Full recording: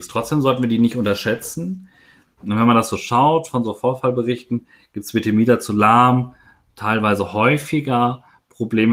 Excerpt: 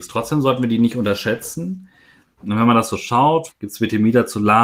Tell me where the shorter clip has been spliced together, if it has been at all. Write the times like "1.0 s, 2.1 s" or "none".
3.5 s